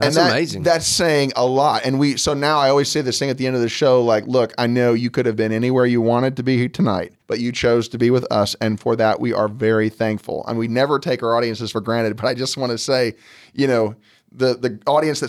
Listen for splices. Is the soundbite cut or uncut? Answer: cut